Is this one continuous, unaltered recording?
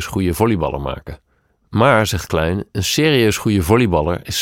yes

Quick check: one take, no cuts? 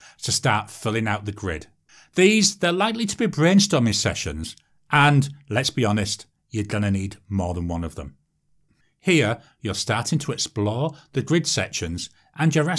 yes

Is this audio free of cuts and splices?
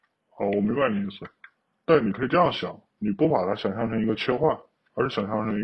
yes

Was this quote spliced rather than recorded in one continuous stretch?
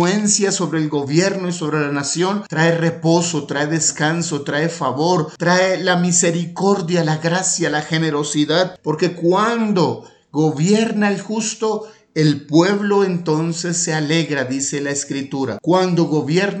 yes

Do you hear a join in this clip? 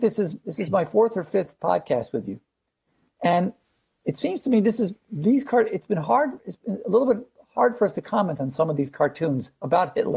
no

